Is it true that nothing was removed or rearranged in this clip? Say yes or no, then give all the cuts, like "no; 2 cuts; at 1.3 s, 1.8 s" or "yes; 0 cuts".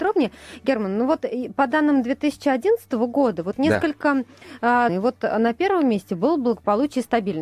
no; 1 cut; at 4.9 s